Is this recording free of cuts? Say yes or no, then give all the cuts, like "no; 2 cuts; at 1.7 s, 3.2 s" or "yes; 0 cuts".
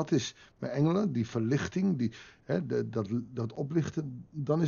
yes; 0 cuts